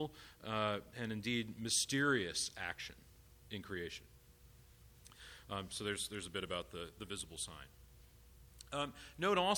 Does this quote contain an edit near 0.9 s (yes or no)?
yes